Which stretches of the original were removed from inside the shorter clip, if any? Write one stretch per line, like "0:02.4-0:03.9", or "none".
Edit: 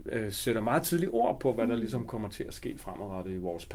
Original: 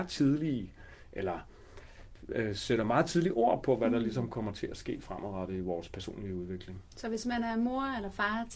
none